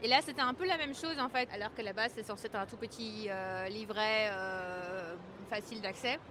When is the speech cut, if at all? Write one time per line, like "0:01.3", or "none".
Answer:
0:01.5